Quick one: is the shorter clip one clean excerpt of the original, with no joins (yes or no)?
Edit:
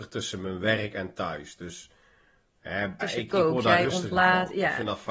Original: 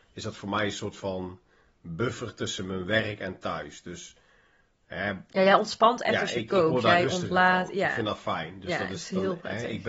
no